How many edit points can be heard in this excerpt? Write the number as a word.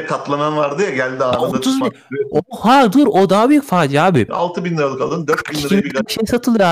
two